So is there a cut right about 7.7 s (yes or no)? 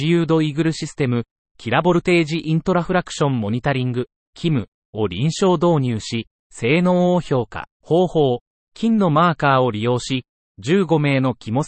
yes